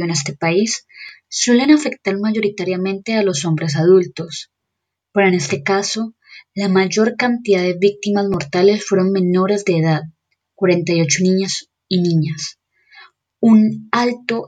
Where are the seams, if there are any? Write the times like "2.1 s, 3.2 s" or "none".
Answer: none